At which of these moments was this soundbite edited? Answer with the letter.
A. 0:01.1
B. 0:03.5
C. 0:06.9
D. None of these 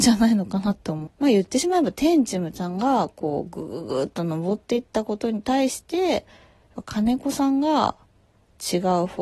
A